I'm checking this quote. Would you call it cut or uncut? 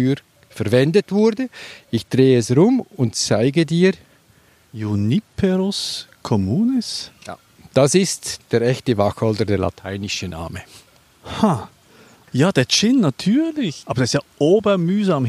uncut